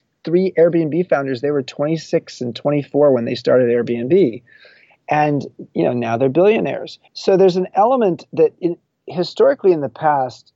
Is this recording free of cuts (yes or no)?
no